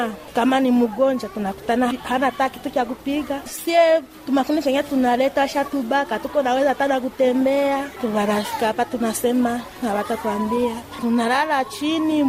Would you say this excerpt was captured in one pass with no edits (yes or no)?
yes